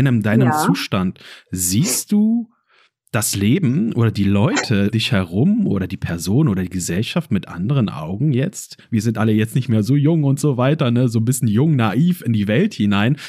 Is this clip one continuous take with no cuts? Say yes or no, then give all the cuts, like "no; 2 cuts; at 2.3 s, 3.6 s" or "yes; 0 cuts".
no; 2 cuts; at 4.9 s, 8.9 s